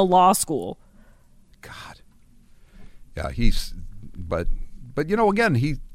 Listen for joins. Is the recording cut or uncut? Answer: uncut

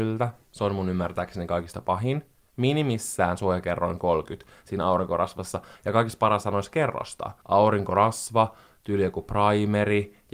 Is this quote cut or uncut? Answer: uncut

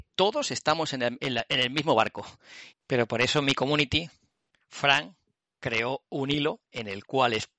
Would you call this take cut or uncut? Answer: cut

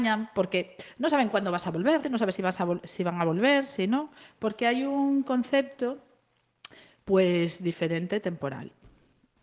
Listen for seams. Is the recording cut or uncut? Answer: cut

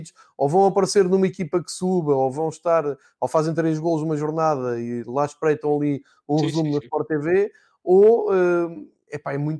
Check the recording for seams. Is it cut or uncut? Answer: uncut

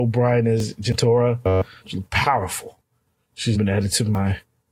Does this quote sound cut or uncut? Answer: cut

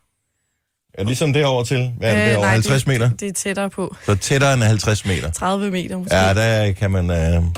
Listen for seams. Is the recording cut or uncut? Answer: uncut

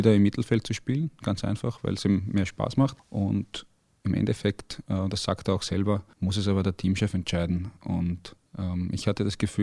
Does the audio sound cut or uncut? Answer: uncut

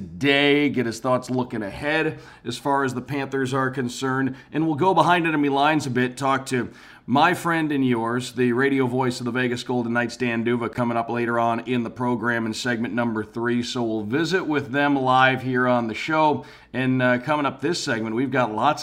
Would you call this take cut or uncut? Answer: uncut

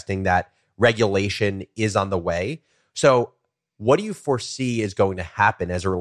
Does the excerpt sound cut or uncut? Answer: uncut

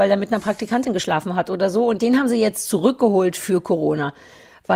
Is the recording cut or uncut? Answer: uncut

